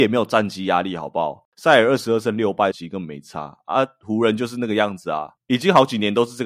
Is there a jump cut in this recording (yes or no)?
yes